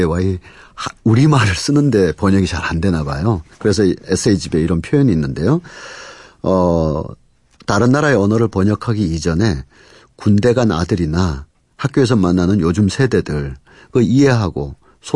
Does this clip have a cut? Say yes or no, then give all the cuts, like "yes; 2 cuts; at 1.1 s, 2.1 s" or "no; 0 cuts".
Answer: no; 0 cuts